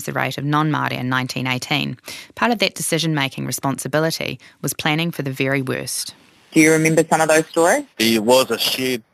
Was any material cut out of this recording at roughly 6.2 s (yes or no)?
no